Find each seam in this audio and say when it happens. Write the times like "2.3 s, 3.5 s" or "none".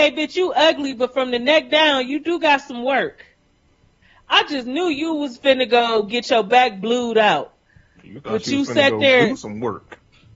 none